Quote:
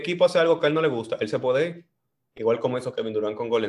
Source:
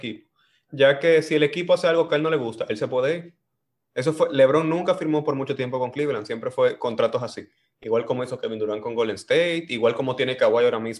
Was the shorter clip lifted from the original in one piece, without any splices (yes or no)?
no